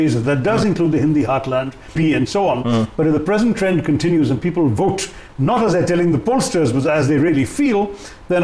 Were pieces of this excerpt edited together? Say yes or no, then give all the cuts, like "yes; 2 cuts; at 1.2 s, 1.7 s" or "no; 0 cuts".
yes; 1 cut; at 2.0 s